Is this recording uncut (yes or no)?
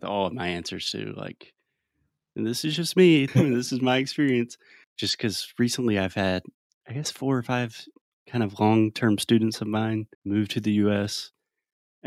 no